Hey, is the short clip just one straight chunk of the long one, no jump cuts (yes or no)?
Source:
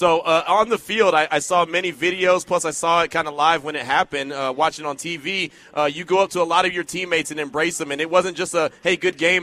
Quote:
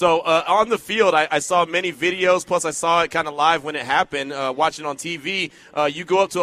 yes